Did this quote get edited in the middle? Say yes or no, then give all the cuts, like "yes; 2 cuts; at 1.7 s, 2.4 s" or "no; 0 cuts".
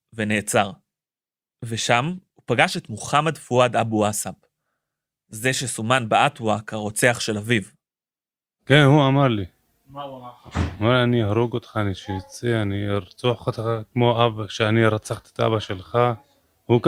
yes; 1 cut; at 2.3 s